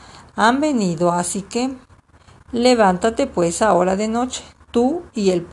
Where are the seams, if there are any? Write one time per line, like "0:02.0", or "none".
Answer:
0:02.4